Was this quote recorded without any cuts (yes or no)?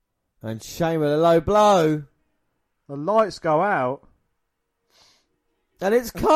yes